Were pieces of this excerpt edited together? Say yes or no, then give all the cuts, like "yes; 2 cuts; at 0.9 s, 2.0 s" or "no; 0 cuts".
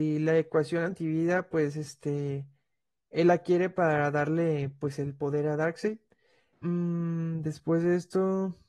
yes; 1 cut; at 6.5 s